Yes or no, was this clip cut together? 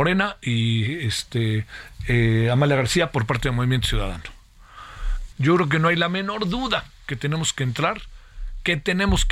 yes